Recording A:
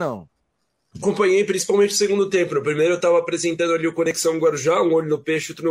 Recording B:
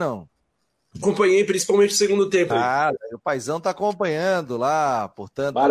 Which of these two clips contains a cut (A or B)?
B